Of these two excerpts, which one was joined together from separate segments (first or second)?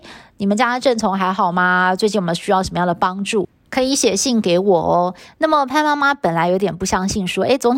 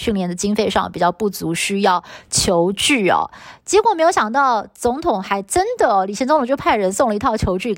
first